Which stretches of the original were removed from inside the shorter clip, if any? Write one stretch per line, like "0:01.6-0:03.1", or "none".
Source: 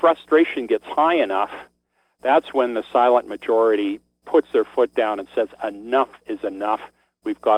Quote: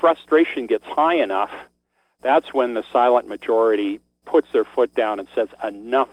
none